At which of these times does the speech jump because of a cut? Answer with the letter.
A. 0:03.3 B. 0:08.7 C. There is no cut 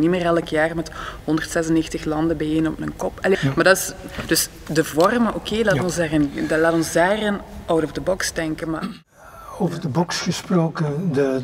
A